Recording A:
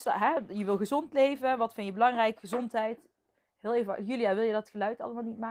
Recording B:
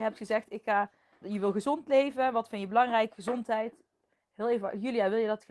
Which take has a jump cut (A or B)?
B